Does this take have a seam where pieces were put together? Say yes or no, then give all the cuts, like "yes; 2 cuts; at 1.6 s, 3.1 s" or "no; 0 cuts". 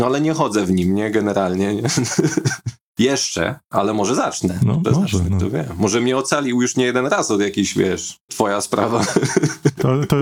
yes; 2 cuts; at 4.8 s, 8.3 s